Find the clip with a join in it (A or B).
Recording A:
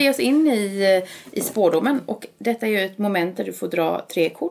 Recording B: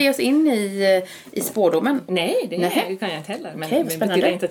B